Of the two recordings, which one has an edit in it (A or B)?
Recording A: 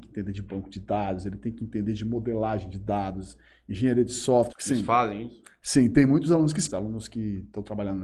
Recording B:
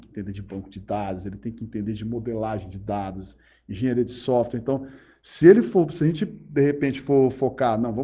A